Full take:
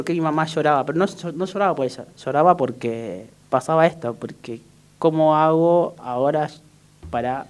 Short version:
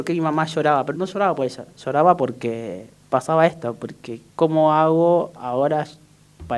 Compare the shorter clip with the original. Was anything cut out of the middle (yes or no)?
yes